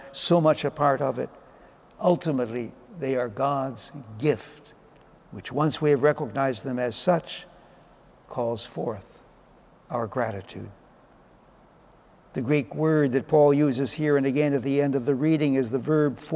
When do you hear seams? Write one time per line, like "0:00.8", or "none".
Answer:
none